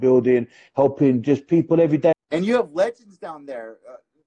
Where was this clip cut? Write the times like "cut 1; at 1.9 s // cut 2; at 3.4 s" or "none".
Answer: cut 1; at 2.1 s